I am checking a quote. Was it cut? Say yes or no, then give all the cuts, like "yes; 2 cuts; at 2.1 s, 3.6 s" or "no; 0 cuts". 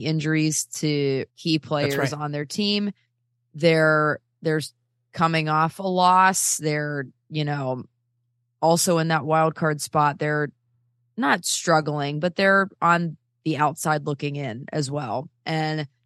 yes; 1 cut; at 1.3 s